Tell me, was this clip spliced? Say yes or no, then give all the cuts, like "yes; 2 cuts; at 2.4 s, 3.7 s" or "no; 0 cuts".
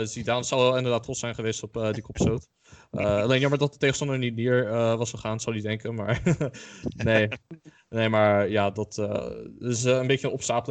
no; 0 cuts